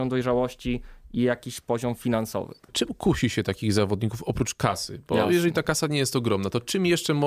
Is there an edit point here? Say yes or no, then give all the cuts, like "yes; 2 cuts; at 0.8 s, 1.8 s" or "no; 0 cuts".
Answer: no; 0 cuts